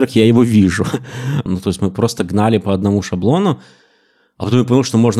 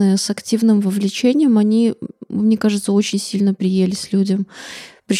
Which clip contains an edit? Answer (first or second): first